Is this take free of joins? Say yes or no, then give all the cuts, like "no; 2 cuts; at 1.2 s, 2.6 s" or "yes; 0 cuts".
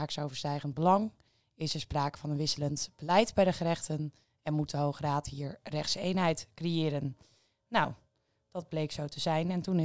yes; 0 cuts